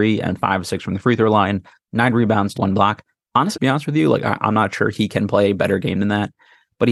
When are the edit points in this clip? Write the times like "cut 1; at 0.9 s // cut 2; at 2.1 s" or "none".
cut 1; at 2.5 s // cut 2; at 3.5 s